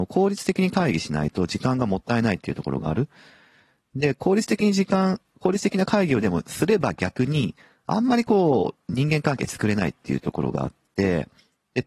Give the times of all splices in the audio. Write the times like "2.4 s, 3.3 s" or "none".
none